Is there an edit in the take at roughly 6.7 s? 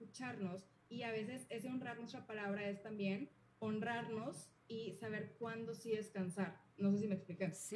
yes; 1 cut; at 6.7 s

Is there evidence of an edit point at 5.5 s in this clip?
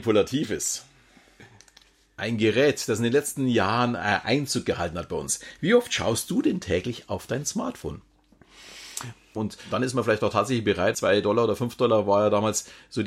no; 2 cuts; at 9.4 s, 10.9 s

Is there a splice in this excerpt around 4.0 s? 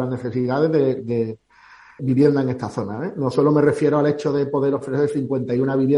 no; 1 cut; at 2.0 s

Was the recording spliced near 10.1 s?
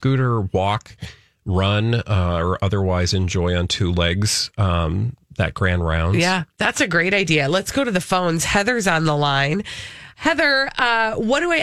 yes; 1 cut; at 10.1 s

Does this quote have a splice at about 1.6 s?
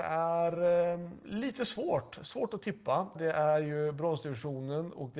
no; 1 cut; at 3.1 s

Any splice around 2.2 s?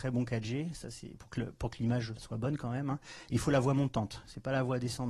yes; 1 cut; at 2.2 s

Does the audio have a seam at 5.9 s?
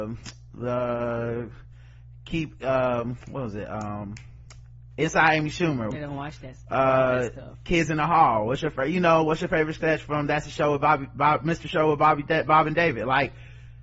yes; 1 cut; at 5.9 s

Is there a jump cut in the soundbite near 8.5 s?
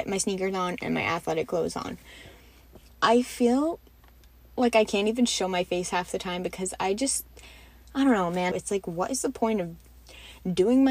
yes; 1 cut; at 8.5 s

